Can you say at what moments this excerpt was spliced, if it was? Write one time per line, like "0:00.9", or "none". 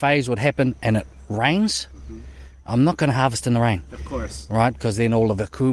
none

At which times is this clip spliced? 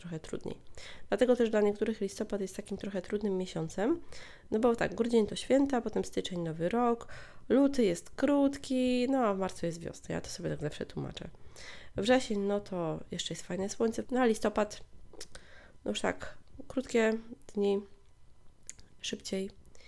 0:14.0
0:19.0

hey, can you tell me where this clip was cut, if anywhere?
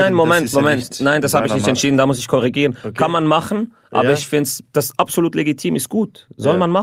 0:04.7

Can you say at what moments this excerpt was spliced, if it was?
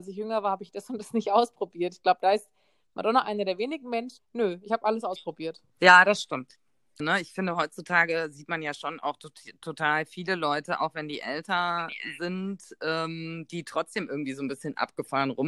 0:04.2
0:07.0

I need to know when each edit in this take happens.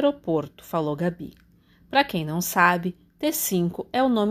none

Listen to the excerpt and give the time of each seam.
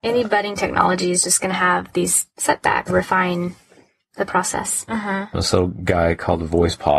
0:02.9
0:04.9

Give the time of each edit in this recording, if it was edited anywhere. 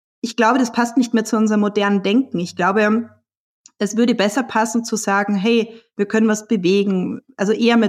none

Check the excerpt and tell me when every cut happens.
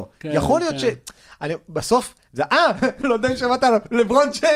0:03.0

